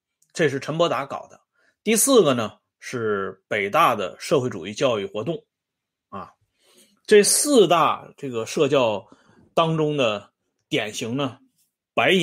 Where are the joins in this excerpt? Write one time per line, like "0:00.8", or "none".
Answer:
0:01.8